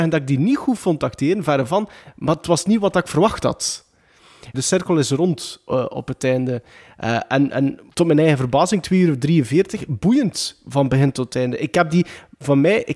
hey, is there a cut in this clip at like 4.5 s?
yes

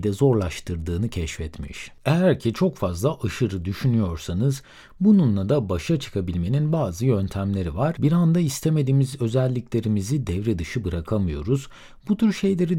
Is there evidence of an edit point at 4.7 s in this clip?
no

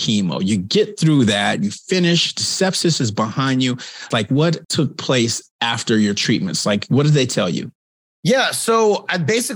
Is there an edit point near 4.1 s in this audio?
yes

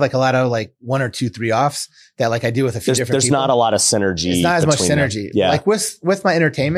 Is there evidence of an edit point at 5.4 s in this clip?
no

